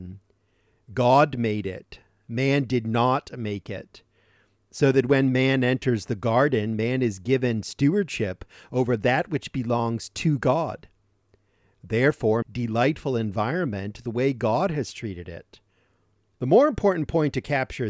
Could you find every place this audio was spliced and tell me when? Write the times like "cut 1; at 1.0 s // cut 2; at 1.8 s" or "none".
cut 1; at 12.4 s // cut 2; at 16.4 s

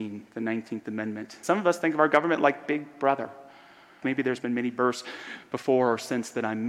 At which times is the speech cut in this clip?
cut 1; at 1.4 s // cut 2; at 4.0 s

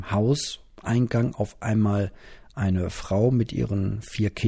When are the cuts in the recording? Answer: none

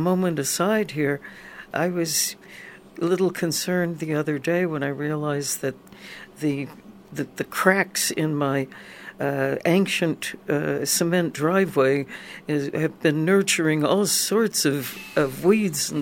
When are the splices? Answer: cut 1; at 1.7 s

